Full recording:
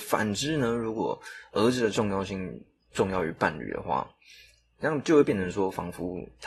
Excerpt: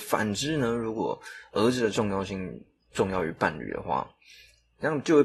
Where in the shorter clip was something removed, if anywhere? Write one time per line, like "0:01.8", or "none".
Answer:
none